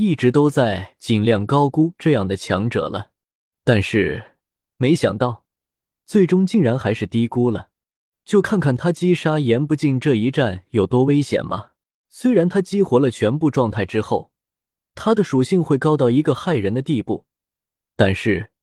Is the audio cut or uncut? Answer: cut